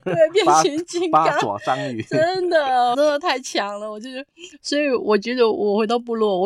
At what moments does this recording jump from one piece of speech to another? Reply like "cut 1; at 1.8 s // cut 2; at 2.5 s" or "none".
cut 1; at 2.9 s